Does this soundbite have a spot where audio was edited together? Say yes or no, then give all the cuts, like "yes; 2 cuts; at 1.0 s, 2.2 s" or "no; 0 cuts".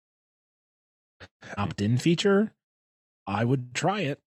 yes; 1 cut; at 1.6 s